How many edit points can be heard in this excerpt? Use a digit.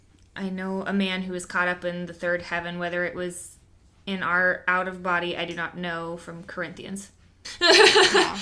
1